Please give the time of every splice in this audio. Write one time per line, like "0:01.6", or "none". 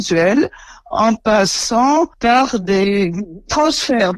0:02.1